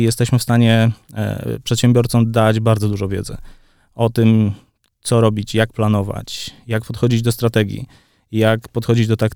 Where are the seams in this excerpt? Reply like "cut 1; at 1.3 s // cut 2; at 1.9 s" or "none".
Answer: none

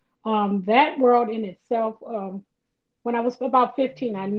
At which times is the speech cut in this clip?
none

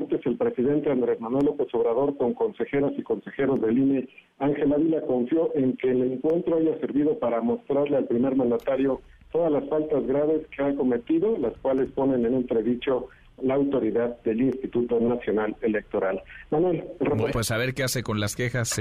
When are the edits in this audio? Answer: cut 1; at 17.3 s

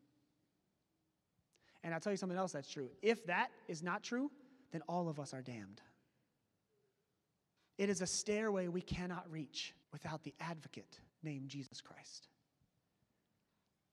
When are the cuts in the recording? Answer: cut 1; at 7.6 s // cut 2; at 9.8 s // cut 3; at 11.1 s

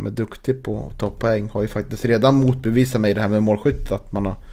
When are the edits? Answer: none

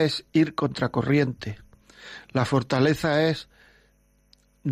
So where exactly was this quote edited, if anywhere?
none

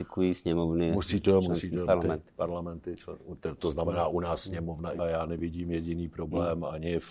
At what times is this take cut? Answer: cut 1; at 1.9 s // cut 2; at 5.0 s

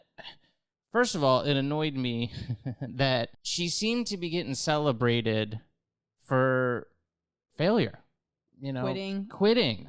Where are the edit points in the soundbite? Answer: cut 1; at 3.3 s // cut 2; at 8.5 s

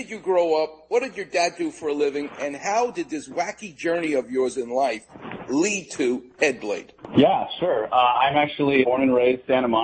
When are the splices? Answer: cut 1; at 8.8 s

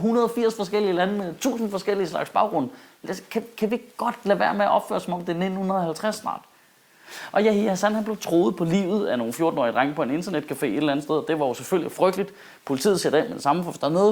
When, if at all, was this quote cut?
none

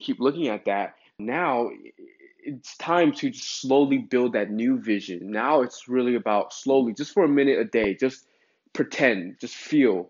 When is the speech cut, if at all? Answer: cut 1; at 1.2 s

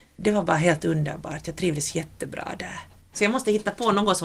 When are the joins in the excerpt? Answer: cut 1; at 3.1 s

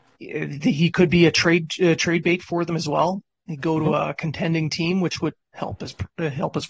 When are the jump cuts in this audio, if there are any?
cut 1; at 5.4 s

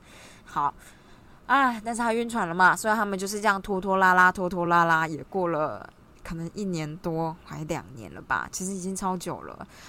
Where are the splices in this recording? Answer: none

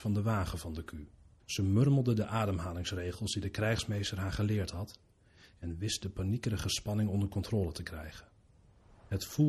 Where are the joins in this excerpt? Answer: cut 1; at 1.4 s

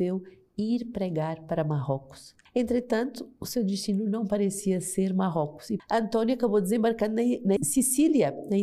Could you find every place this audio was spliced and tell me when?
cut 1; at 2.5 s // cut 2; at 5.8 s // cut 3; at 7.6 s

